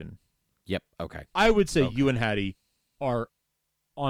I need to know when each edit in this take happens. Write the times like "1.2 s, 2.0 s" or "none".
none